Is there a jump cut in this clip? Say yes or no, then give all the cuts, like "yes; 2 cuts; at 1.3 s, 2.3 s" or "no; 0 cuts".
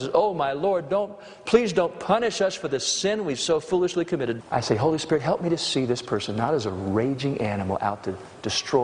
yes; 1 cut; at 4.4 s